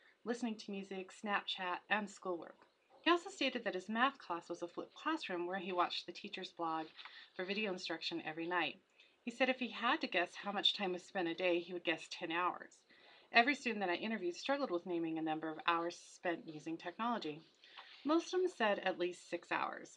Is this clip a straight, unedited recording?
yes; 0 cuts

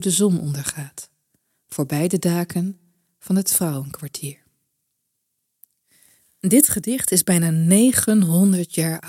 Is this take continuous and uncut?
yes; 0 cuts

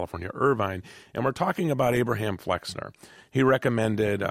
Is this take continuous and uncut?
yes; 0 cuts

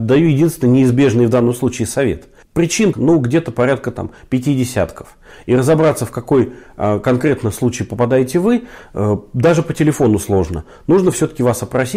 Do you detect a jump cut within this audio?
yes; 1 cut; at 2.9 s

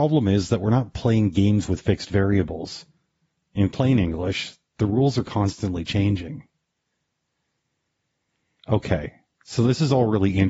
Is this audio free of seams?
yes; 0 cuts

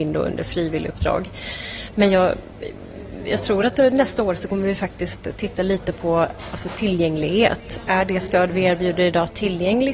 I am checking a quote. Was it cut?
yes; 1 cut; at 1.9 s

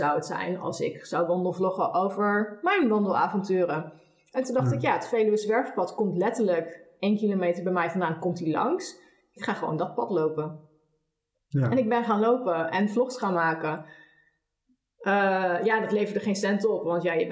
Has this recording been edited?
no; 0 cuts

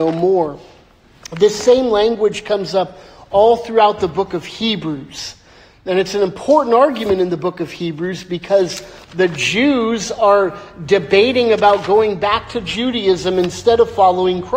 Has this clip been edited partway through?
no; 0 cuts

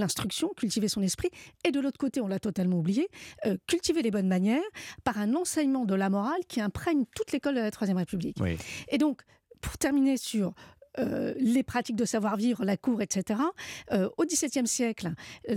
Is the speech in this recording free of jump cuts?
yes; 0 cuts

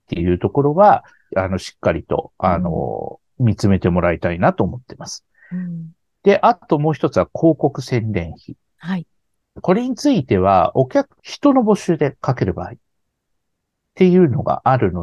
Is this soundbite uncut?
no; 2 cuts; at 1.3 s, 11.2 s

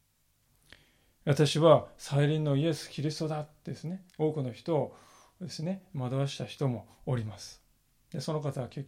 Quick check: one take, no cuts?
no; 1 cut; at 4.1 s

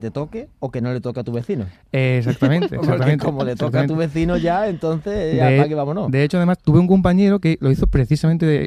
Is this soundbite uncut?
yes; 0 cuts

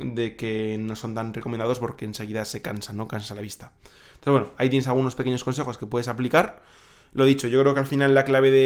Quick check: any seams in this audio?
no; 0 cuts

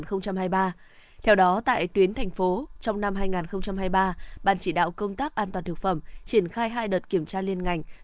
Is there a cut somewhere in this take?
no; 0 cuts

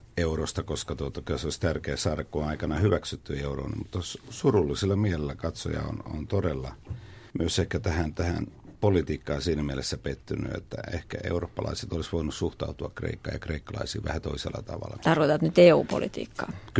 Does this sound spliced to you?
yes; 2 cuts; at 7.3 s, 15.0 s

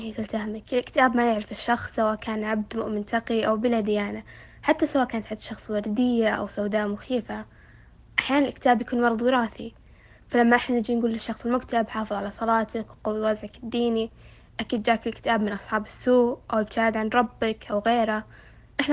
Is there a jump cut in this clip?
no; 0 cuts

